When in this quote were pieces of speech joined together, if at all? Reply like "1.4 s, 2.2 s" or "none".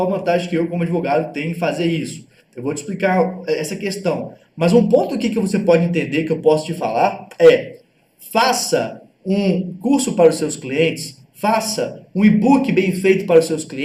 none